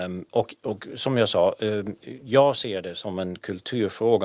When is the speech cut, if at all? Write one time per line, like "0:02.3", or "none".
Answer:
none